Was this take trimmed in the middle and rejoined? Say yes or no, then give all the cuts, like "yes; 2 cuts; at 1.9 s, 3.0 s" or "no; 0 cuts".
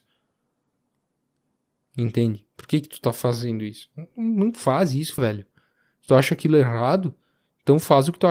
yes; 1 cut; at 5.2 s